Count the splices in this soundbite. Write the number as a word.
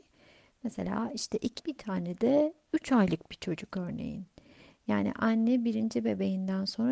one